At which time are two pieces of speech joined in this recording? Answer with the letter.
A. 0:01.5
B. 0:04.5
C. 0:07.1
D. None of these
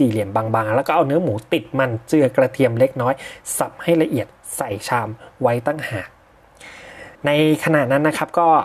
C